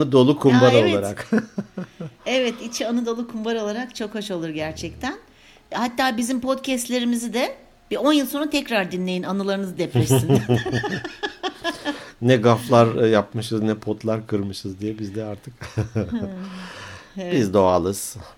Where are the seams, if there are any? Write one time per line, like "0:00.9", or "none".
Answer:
0:05.7